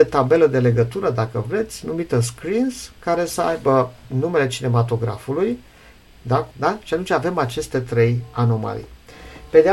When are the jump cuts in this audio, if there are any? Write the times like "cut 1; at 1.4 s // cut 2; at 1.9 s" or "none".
cut 1; at 6.5 s